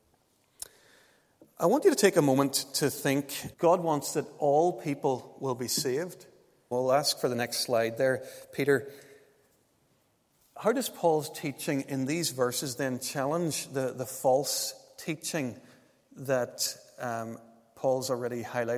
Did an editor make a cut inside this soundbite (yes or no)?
yes